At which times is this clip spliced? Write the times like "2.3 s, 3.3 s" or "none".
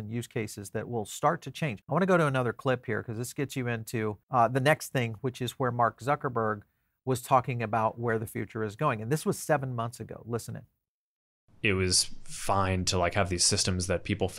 4.2 s